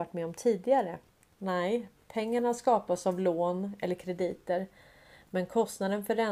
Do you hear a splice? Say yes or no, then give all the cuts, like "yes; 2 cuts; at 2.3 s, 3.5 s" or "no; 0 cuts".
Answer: yes; 1 cut; at 1.4 s